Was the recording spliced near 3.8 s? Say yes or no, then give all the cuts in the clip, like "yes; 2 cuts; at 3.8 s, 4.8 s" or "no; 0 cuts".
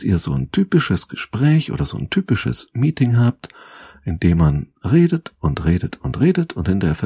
no; 0 cuts